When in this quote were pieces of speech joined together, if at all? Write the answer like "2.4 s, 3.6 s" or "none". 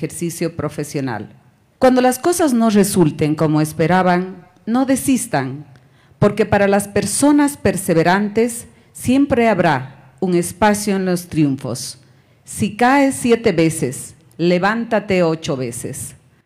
none